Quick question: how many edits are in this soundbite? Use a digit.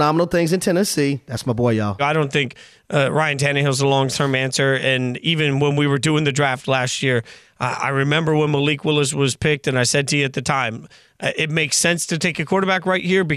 1